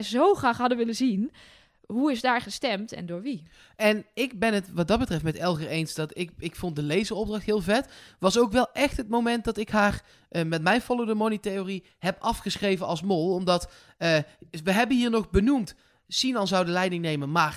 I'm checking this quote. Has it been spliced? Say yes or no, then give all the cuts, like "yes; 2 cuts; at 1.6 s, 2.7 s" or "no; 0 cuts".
no; 0 cuts